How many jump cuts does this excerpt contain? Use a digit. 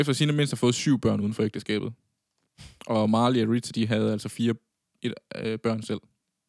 0